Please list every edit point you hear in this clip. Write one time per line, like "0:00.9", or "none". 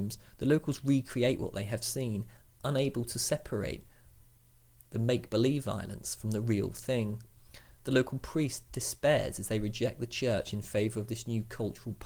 none